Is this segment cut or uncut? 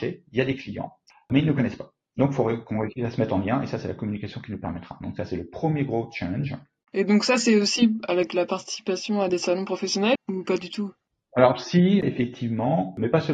cut